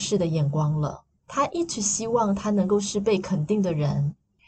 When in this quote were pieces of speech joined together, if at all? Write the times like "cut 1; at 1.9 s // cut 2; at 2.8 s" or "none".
cut 1; at 1.2 s